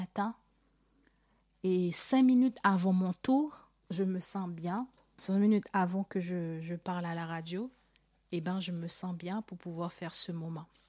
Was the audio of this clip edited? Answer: yes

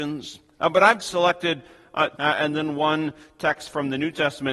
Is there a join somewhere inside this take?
yes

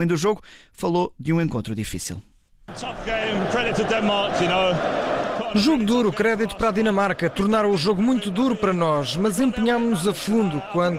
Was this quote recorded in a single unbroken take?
yes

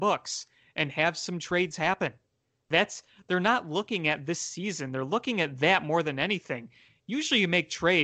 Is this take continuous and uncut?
yes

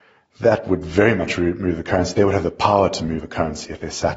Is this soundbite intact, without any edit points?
yes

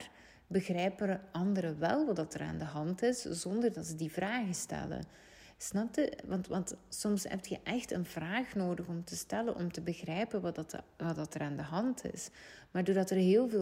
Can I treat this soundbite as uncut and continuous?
yes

